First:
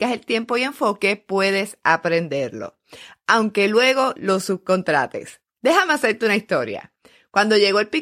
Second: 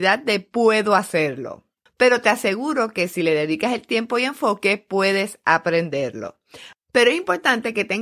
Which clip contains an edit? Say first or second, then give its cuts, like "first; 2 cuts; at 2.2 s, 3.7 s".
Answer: second; 2 cuts; at 1.9 s, 6.7 s